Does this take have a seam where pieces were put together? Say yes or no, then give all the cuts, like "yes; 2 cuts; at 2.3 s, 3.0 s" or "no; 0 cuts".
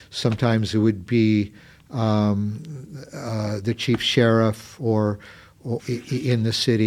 yes; 1 cut; at 5.8 s